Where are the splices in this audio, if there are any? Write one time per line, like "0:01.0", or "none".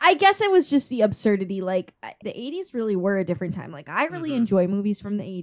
0:02.2